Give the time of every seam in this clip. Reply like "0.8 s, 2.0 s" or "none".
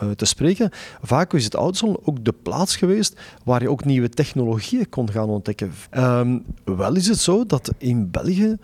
5.9 s